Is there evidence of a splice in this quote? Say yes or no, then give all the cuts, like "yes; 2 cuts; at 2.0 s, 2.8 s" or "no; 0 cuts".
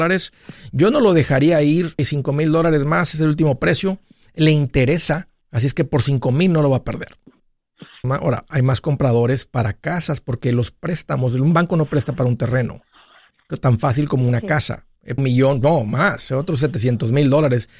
yes; 3 cuts; at 2.0 s, 8.0 s, 15.2 s